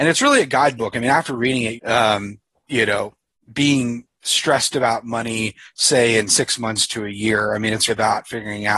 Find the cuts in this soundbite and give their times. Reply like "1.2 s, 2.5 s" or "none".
1.8 s, 7.9 s